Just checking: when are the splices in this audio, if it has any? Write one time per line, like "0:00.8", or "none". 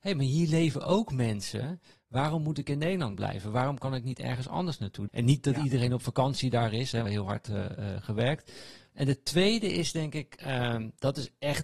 0:05.1
0:07.1
0:08.9